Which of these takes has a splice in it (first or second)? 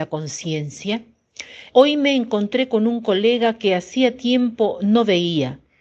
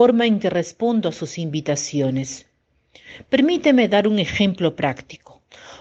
first